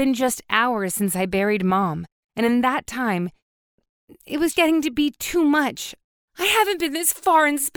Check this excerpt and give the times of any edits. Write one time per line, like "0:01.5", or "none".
0:04.5
0:06.2

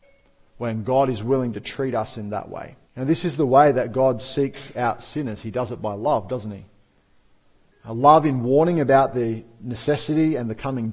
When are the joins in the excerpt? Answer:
0:02.9

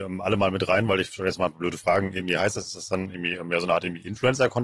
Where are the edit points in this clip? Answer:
none

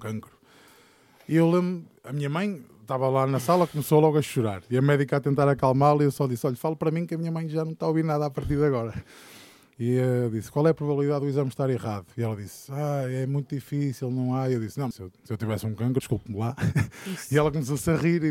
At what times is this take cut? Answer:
0:14.9
0:16.0

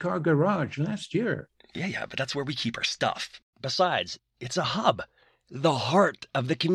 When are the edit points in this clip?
0:04.2

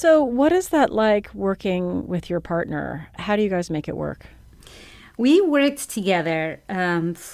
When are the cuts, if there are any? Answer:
none

